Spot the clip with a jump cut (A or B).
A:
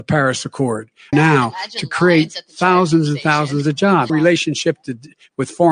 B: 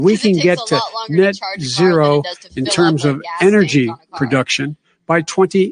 A